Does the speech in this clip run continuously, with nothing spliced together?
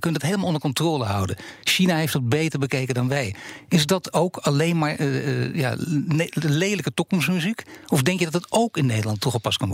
yes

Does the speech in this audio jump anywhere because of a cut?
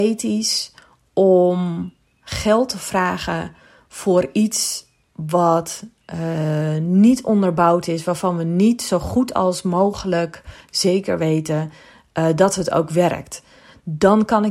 no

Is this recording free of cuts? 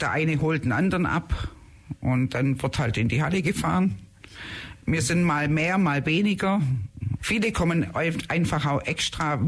no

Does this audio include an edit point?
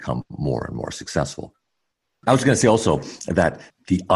no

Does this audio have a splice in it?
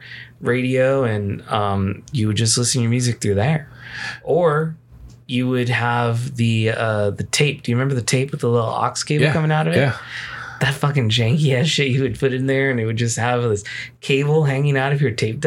no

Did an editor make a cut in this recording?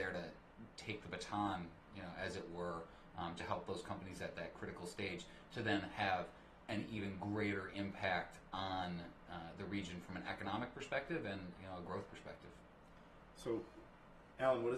yes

